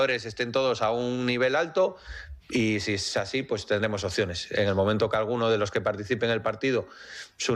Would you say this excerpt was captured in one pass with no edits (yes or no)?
no